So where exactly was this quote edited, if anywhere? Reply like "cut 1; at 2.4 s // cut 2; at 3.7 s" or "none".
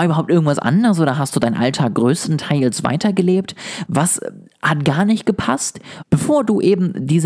cut 1; at 3.9 s // cut 2; at 6.0 s